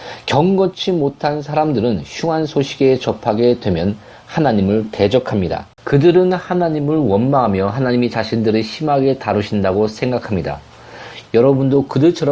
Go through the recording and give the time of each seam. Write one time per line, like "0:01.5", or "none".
0:05.7
0:11.3